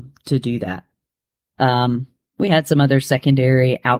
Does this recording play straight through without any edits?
no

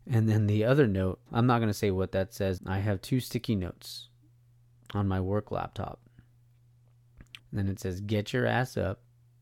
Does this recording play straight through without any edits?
no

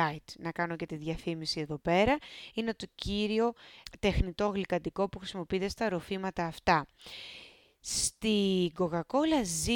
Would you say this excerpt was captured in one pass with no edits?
yes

